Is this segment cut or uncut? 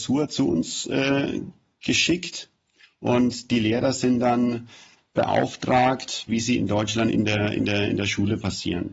cut